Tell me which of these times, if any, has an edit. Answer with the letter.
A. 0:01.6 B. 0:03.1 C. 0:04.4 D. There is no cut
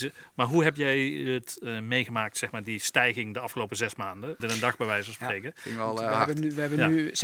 C